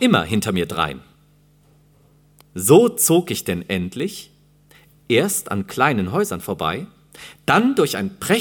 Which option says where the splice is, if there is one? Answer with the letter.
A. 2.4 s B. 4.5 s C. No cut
A